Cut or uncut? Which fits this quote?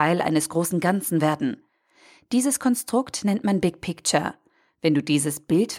uncut